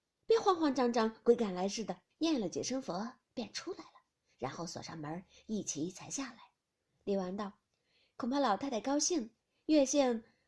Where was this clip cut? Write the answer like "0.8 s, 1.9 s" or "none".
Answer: 2.1 s